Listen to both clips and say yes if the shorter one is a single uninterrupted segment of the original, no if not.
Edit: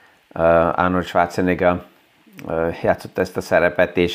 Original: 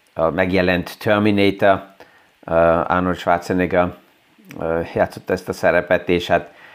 yes